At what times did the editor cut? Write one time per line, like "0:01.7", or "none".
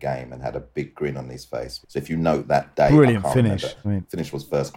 0:01.8
0:03.8